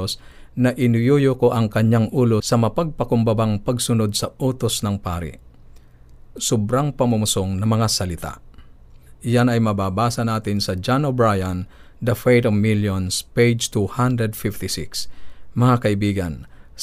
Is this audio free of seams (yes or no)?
yes